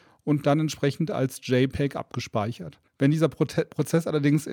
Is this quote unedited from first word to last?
no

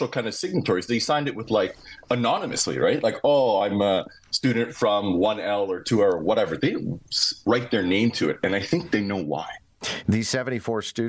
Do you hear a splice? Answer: no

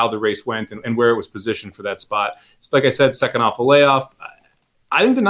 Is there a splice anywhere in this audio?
no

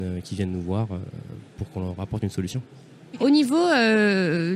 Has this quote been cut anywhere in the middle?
yes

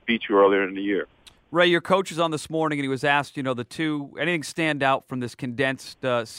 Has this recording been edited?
no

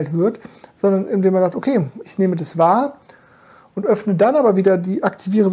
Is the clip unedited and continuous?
yes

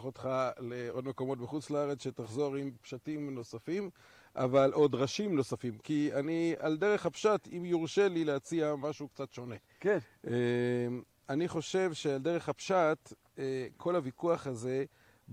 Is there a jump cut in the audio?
no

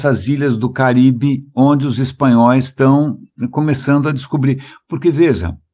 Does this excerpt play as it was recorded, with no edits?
yes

